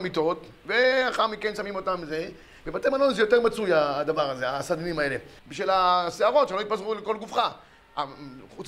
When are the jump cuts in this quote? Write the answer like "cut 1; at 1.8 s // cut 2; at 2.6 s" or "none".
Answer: cut 1; at 5.4 s